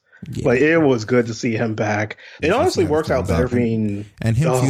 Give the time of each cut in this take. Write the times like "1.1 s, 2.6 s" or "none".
2.4 s, 3.5 s